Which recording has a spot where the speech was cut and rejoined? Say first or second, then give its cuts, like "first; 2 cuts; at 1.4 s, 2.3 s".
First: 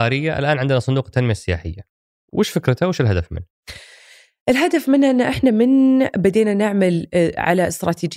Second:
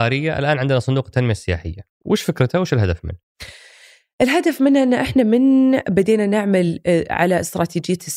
second; 1 cut; at 1.9 s